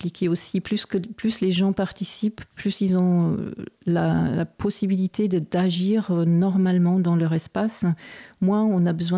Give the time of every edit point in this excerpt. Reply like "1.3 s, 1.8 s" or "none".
none